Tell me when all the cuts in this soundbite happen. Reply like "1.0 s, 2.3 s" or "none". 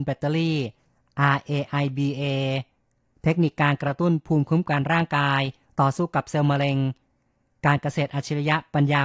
none